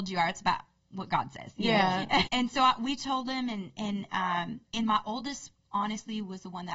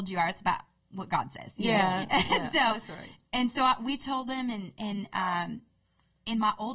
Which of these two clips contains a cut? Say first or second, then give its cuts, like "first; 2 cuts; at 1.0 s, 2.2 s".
first; 2 cuts; at 2.3 s, 4.6 s